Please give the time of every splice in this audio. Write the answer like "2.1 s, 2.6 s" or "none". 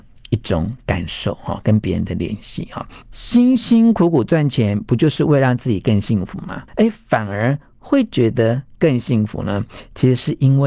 3.0 s, 6.7 s